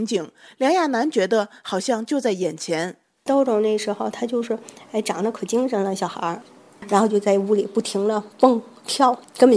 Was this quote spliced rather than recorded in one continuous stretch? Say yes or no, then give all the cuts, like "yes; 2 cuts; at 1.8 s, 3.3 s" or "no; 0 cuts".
no; 0 cuts